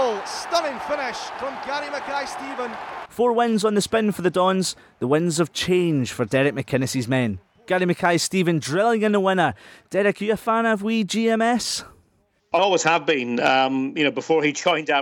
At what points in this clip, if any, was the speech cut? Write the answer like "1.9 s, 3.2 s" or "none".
3.1 s, 12.6 s